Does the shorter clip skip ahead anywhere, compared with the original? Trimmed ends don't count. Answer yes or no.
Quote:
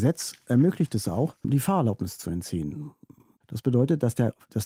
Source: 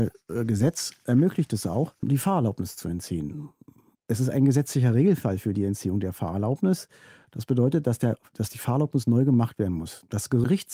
yes